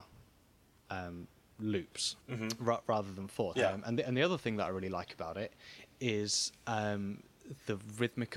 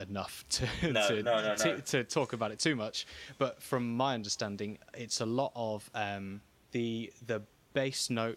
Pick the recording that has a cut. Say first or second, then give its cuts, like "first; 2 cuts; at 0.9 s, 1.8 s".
first; 2 cuts; at 2.2 s, 3.5 s